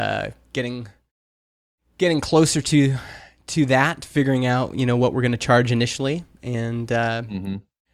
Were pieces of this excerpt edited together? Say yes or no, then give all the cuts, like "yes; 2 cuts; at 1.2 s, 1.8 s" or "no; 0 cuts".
no; 0 cuts